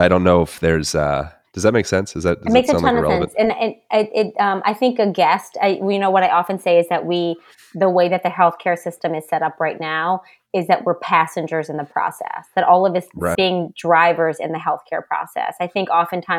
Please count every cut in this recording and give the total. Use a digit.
1